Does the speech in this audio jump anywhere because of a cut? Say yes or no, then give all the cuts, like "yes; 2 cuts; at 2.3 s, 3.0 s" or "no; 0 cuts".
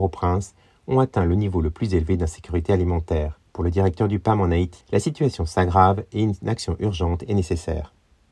yes; 2 cuts; at 3.5 s, 4.8 s